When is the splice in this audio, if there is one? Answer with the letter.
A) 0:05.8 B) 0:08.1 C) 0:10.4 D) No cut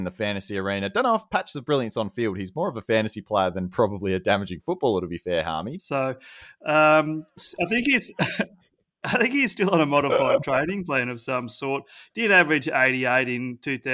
A